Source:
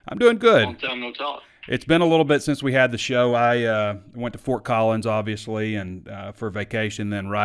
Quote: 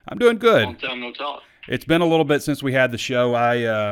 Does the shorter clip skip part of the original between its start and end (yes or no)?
no